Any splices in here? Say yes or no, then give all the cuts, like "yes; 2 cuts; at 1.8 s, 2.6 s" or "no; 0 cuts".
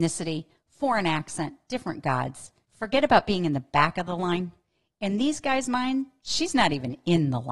yes; 1 cut; at 2.6 s